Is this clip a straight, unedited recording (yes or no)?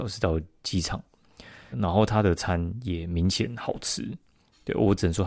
no